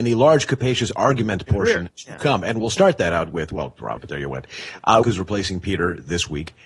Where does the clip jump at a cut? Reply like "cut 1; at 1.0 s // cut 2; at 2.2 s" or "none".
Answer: cut 1; at 4.0 s // cut 2; at 5.0 s